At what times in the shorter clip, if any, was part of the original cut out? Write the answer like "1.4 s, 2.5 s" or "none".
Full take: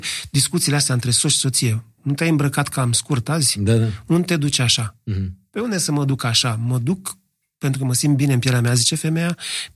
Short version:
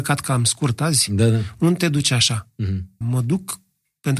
3.0 s